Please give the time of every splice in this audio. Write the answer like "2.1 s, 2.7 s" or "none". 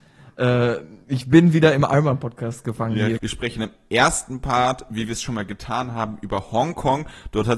3.2 s